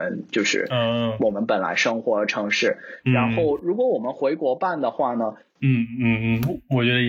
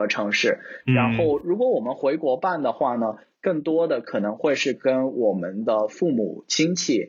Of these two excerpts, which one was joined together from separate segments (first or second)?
first